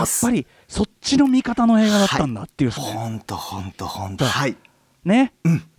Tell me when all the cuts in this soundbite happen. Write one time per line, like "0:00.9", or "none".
0:02.8
0:04.2